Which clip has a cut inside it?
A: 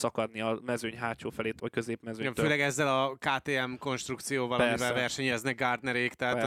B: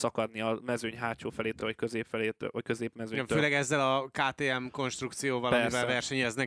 A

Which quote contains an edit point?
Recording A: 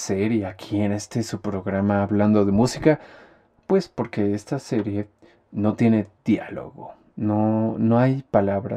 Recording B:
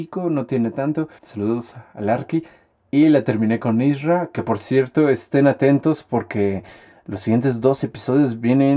B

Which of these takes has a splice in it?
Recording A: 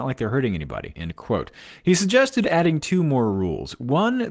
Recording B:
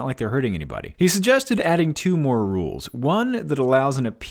B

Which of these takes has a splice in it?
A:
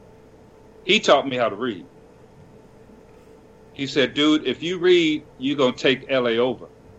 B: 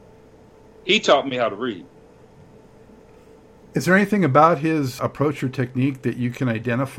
B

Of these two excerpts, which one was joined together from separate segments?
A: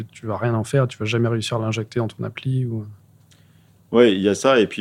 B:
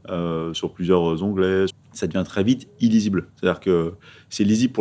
B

